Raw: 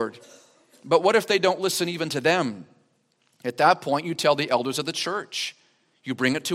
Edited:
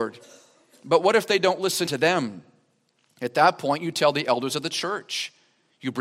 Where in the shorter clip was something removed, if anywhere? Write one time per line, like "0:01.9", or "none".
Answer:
0:01.9